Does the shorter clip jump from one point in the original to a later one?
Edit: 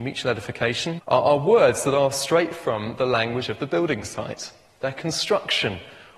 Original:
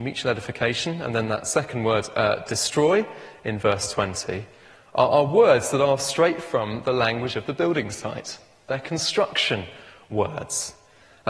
yes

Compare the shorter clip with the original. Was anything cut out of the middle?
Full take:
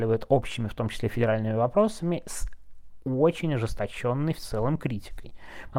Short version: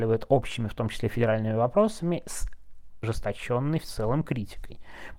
yes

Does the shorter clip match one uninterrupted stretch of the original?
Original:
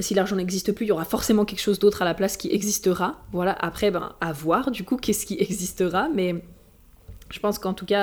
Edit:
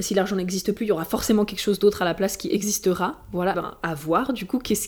no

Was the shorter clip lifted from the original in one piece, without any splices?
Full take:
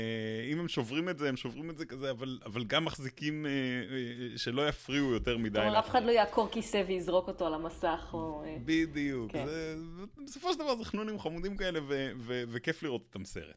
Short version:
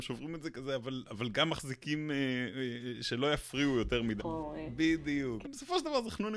no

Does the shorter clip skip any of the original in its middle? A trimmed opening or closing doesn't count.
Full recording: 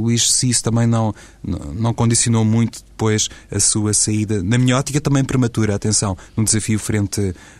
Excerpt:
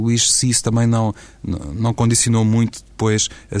no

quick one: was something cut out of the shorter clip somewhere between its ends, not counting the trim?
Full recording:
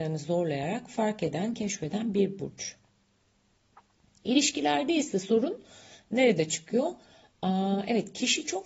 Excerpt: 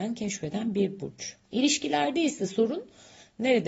yes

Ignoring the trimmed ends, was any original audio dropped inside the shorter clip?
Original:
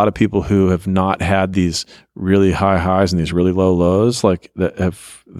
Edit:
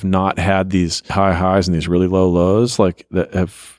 yes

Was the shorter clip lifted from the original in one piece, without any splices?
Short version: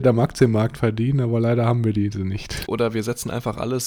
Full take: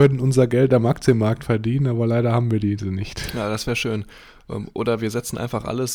no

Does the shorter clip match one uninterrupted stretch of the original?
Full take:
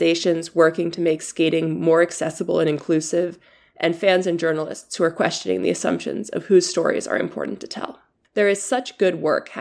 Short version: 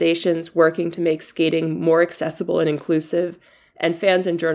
yes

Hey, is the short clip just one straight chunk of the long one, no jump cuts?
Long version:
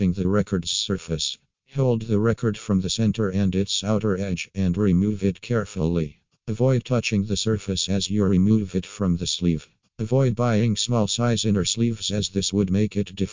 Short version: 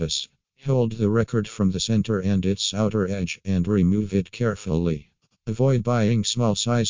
no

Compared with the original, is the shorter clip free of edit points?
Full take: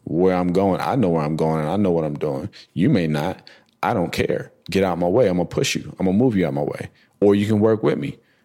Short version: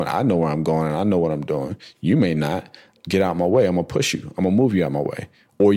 no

